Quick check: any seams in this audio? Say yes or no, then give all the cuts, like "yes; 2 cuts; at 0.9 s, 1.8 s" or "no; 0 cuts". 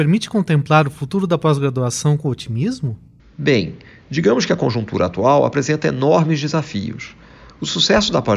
no; 0 cuts